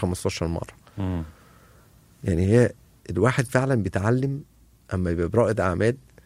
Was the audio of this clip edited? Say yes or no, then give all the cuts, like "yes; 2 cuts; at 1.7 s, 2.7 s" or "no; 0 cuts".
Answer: no; 0 cuts